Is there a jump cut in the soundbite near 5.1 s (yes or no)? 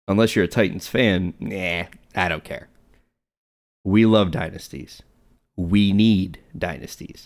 no